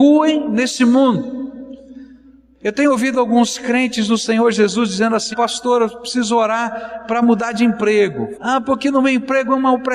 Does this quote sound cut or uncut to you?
cut